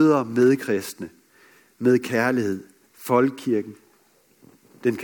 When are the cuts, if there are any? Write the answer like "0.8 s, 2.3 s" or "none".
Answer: 2.9 s